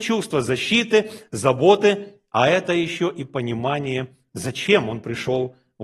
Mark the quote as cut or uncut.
uncut